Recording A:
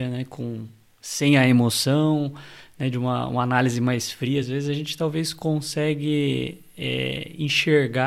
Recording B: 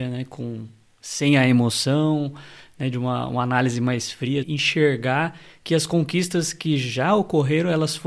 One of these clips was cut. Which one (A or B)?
B